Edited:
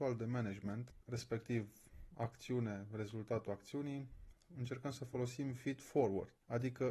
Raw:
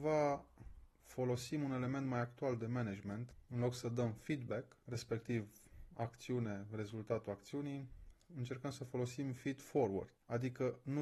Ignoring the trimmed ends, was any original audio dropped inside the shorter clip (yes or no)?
yes